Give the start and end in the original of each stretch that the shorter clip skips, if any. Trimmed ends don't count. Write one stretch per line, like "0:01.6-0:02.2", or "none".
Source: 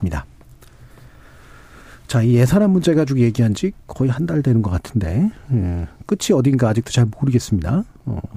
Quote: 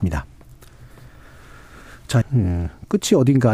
0:02.2-0:05.4